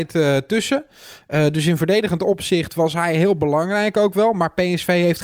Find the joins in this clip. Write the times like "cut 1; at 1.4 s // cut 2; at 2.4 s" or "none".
none